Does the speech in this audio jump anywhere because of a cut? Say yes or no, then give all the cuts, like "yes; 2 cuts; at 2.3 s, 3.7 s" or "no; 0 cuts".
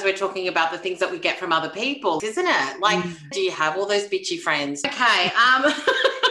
yes; 3 cuts; at 2.2 s, 3.3 s, 4.8 s